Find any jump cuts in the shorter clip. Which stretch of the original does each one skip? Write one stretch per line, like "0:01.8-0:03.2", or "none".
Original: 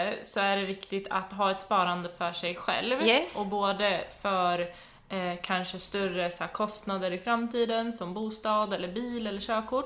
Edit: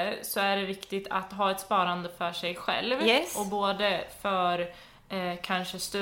none